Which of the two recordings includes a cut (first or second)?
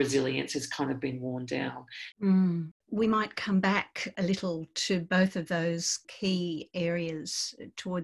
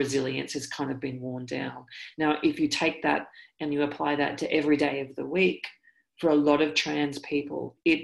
first